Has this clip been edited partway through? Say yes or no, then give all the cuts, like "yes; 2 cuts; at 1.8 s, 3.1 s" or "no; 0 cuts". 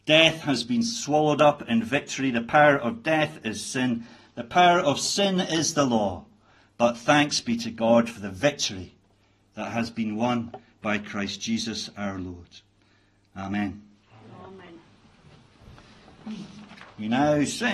no; 0 cuts